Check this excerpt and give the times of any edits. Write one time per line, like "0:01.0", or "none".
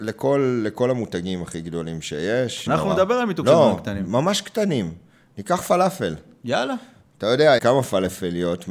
0:02.7
0:07.6